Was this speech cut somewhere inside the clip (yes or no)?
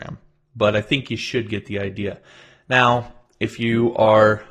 no